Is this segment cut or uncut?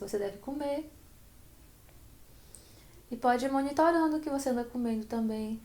uncut